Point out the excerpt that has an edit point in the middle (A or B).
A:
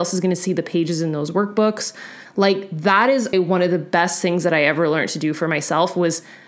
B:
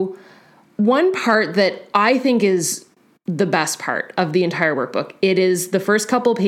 A